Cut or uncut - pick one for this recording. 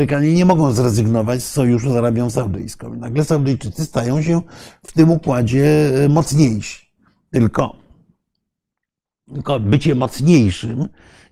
uncut